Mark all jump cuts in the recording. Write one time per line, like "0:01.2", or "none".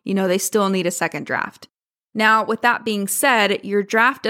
none